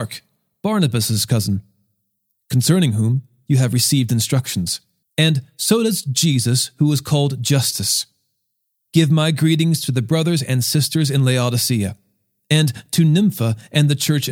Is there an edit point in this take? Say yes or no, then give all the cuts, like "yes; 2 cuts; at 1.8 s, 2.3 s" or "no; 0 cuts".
yes; 2 cuts; at 5.0 s, 8.9 s